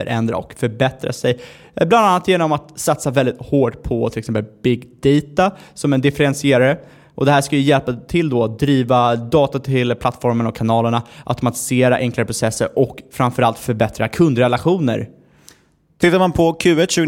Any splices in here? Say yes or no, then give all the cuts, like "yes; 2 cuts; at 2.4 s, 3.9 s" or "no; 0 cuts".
no; 0 cuts